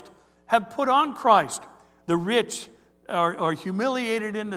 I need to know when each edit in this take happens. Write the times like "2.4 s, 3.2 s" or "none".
2.0 s